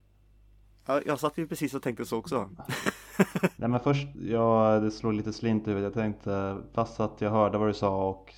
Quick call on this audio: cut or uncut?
cut